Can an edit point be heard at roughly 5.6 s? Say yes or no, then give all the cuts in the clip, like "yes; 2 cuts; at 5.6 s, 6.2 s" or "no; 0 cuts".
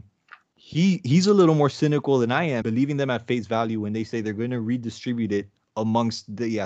no; 1 cut; at 2.6 s